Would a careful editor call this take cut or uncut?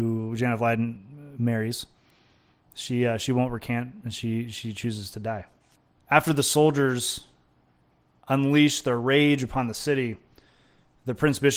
uncut